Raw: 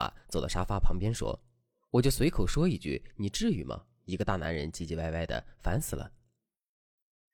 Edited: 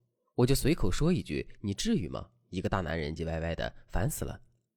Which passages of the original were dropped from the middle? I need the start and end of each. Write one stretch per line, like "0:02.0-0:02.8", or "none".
0:04.7-0:04.9